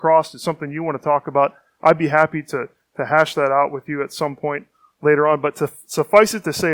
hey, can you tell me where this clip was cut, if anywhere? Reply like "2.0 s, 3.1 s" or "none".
none